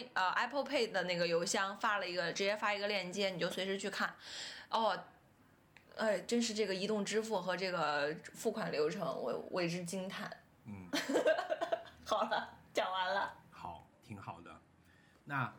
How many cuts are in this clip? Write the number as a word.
one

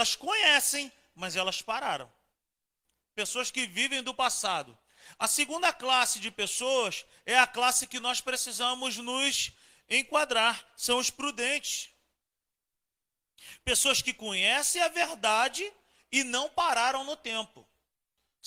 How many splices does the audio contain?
zero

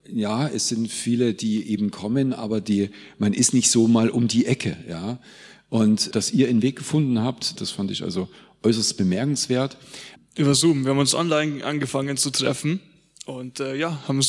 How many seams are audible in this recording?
three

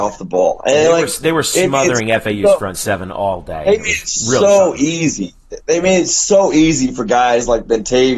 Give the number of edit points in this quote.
zero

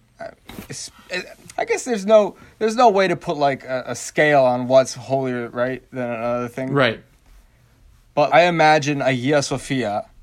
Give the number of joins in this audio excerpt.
two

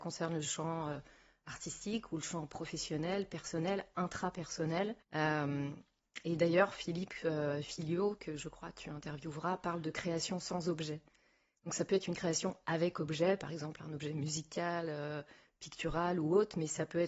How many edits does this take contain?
one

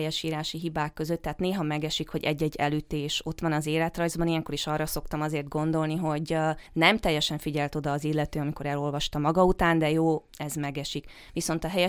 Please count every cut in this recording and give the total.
zero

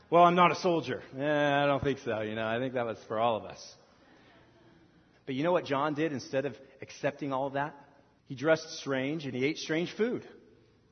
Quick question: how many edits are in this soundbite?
two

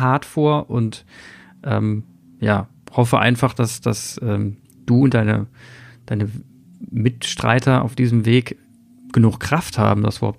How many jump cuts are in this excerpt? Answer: zero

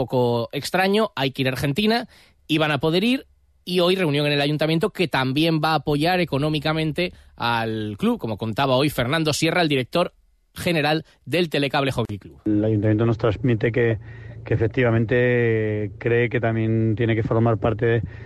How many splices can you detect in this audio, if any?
zero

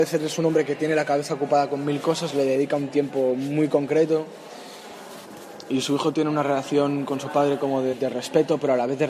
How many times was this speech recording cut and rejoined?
two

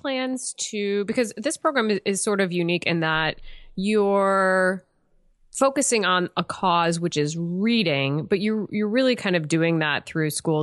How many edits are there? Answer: zero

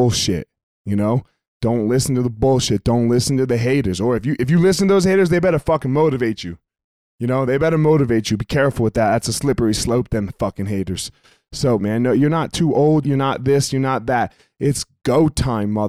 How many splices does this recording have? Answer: two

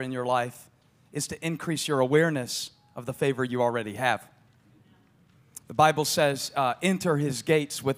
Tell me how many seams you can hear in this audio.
one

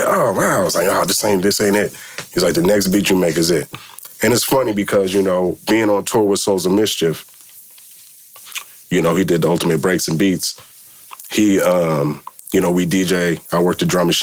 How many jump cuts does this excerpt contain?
one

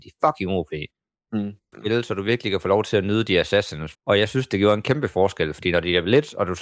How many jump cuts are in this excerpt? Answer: two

